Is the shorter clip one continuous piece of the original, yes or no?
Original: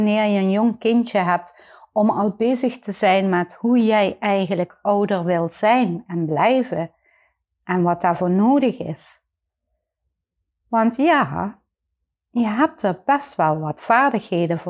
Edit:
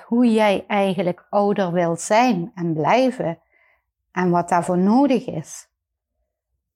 yes